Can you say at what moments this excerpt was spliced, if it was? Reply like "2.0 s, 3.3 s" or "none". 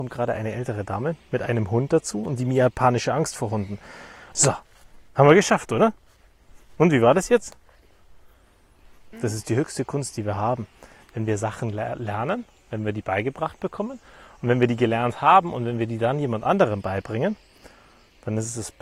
4.3 s, 9.1 s